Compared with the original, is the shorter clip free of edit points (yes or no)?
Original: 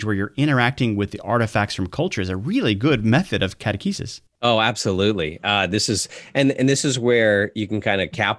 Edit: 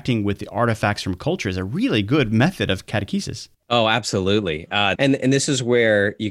no